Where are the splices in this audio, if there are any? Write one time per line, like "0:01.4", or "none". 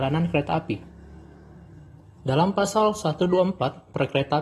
0:02.2